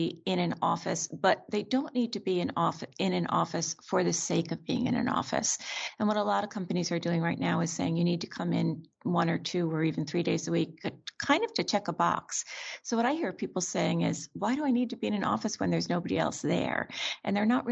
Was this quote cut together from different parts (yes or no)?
no